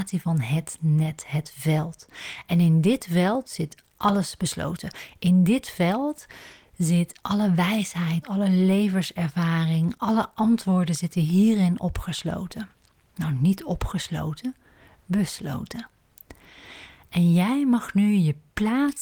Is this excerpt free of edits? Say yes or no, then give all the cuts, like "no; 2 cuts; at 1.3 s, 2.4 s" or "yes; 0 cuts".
no; 1 cut; at 8.2 s